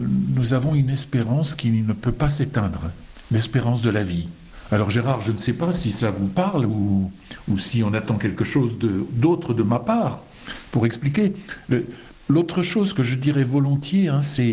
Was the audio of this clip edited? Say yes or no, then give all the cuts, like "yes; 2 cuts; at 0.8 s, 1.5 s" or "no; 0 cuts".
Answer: no; 0 cuts